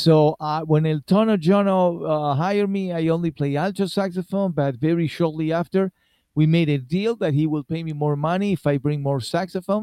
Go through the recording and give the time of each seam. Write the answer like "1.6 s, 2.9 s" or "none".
none